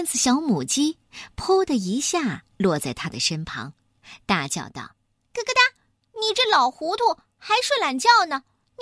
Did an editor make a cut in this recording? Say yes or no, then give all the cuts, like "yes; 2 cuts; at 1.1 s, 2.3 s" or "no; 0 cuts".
no; 0 cuts